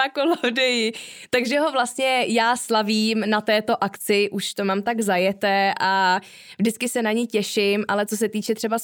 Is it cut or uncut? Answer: uncut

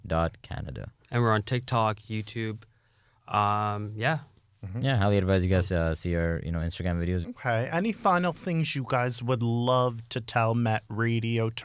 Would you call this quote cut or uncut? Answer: cut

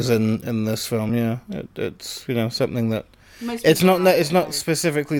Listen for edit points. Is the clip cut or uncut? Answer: uncut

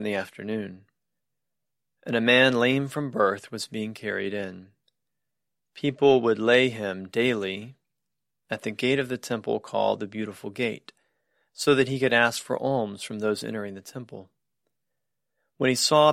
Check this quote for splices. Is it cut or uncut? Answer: uncut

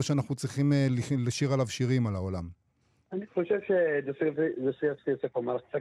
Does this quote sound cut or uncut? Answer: uncut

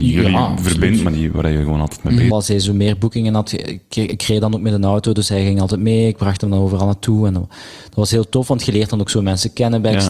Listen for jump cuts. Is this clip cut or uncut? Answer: cut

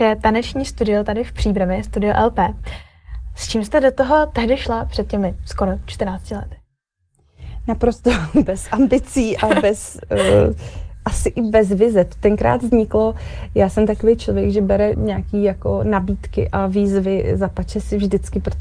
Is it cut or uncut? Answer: cut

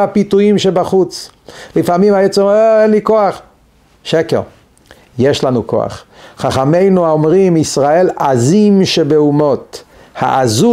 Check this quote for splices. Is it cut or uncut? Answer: uncut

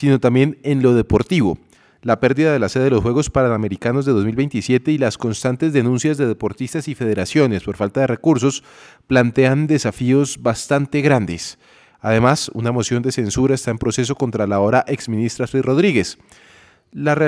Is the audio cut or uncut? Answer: uncut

